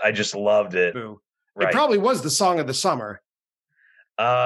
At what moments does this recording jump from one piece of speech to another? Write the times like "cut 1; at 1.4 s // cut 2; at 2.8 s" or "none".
cut 1; at 0.9 s